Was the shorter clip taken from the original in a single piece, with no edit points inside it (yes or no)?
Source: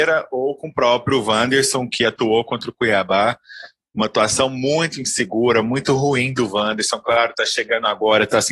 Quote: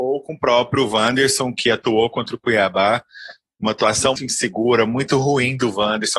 no